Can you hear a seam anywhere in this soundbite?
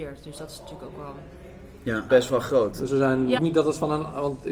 yes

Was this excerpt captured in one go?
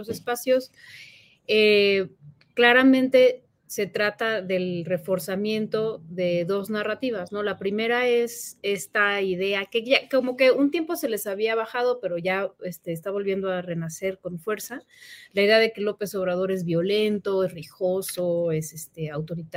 yes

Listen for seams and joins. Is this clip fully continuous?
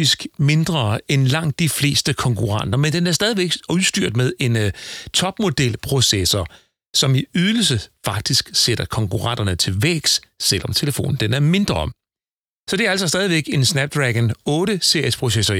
yes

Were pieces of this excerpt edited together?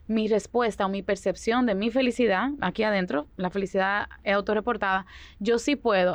no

